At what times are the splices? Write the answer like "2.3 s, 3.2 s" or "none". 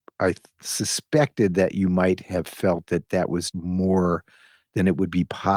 3.5 s